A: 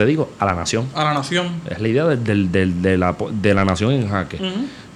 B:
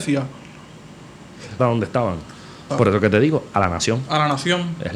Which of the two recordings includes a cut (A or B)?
B